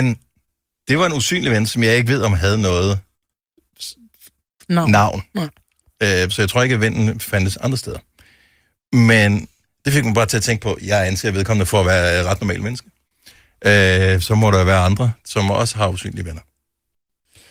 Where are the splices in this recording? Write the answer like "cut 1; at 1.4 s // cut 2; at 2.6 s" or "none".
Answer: cut 1; at 14.2 s